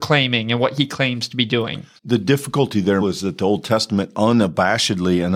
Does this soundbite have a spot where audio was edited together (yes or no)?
yes